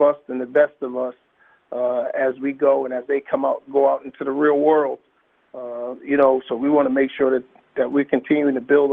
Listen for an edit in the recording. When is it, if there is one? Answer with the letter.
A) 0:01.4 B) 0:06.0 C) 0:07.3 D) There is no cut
D